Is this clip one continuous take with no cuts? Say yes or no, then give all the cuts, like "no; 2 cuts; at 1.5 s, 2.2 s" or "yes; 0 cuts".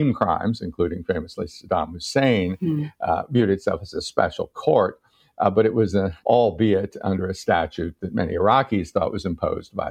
no; 1 cut; at 6.2 s